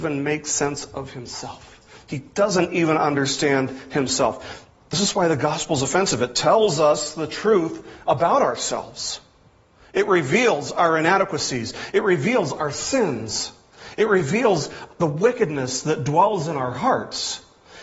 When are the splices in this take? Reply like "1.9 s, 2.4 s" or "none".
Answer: 4.7 s